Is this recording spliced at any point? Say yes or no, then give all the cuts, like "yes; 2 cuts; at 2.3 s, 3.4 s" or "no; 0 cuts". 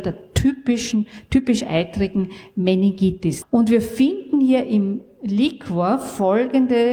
yes; 1 cut; at 3.4 s